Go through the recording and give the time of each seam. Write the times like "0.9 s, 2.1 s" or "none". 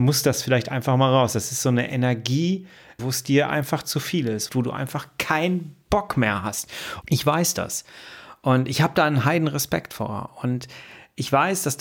3.0 s, 4.5 s, 7.0 s